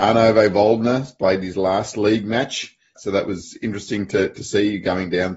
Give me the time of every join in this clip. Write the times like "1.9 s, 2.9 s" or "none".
3.0 s